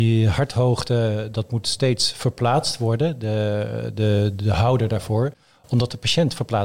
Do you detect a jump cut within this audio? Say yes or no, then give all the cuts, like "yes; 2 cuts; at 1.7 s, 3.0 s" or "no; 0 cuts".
no; 0 cuts